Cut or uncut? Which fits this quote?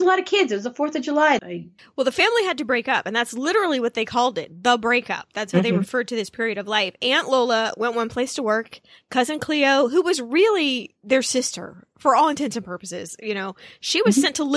cut